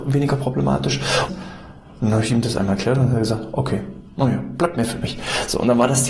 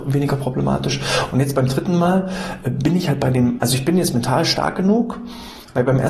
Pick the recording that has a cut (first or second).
first